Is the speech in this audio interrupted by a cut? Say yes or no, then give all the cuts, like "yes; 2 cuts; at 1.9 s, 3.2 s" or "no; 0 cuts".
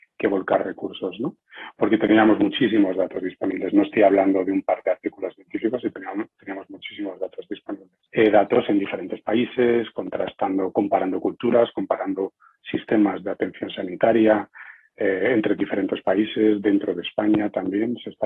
no; 0 cuts